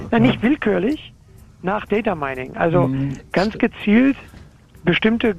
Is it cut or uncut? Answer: uncut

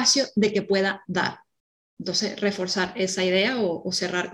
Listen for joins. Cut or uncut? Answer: uncut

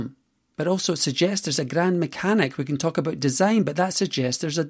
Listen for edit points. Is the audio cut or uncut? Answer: uncut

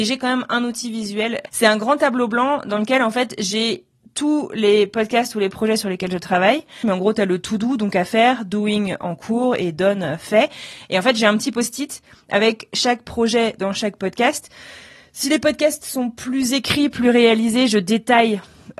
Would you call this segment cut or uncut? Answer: uncut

